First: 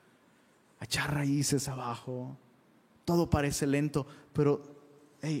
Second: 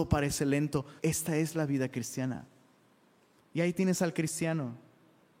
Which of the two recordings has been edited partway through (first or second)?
second